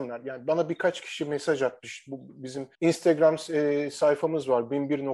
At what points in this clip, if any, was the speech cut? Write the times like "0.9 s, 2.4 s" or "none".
2.7 s